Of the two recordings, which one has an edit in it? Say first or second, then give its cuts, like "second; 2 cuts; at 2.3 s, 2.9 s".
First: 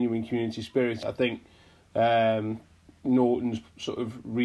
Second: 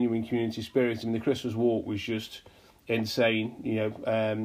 first; 1 cut; at 1.0 s